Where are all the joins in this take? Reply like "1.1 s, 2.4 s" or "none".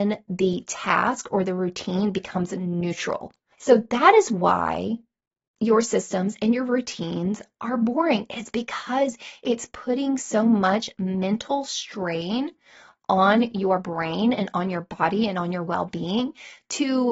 3.5 s